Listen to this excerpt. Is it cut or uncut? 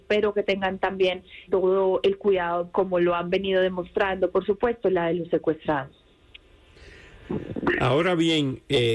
cut